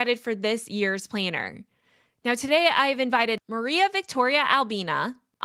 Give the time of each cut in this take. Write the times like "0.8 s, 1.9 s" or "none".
2.2 s